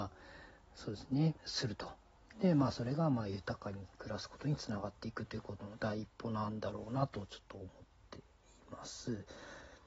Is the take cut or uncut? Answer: cut